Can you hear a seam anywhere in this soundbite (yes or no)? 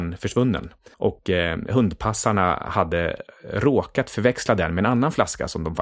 no